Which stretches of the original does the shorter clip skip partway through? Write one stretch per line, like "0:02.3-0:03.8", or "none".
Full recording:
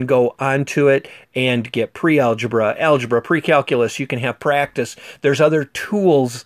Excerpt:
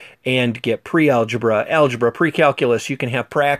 none

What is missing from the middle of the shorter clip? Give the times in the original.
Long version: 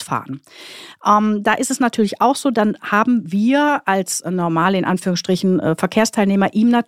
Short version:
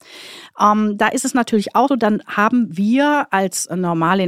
0:02.3-0:02.4

